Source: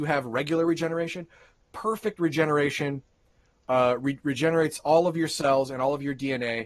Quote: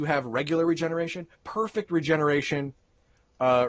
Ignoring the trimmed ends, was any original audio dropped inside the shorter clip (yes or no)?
yes